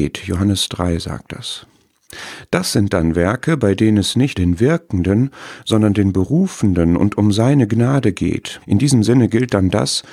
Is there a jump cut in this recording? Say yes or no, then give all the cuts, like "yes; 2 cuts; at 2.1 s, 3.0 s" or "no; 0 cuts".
yes; 2 cuts; at 4.4 s, 8.6 s